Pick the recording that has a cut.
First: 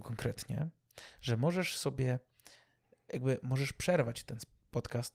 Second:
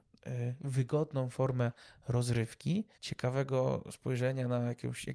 second; 1 cut; at 2.9 s

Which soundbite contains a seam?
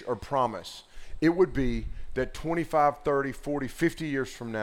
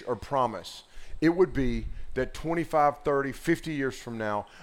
second; 1 cut; at 3.3 s

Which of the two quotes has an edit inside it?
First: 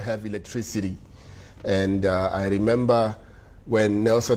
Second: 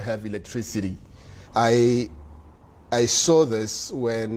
second; 1 cut; at 1.4 s

